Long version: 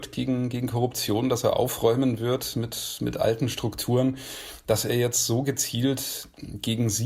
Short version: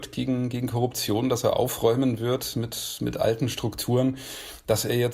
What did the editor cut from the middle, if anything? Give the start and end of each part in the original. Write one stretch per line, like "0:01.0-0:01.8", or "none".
none